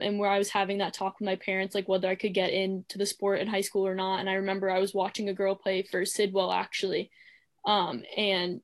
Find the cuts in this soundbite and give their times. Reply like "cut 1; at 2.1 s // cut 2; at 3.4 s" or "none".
none